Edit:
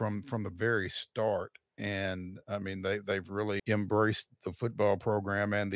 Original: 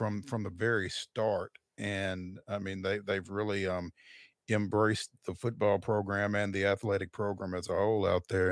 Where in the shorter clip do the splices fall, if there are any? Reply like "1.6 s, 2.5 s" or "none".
3.6 s